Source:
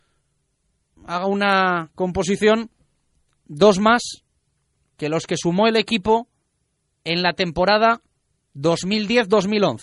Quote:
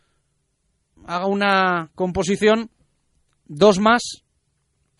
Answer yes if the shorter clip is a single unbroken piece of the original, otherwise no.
yes